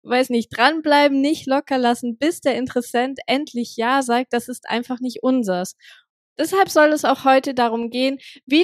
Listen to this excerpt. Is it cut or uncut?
uncut